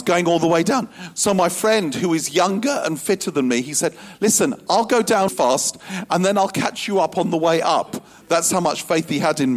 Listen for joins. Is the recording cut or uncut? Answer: cut